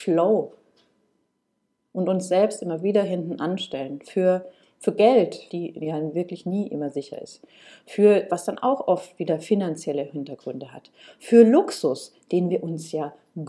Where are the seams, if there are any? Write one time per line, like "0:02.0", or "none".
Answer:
0:05.5
0:08.3